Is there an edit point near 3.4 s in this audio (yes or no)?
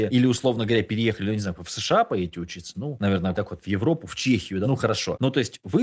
yes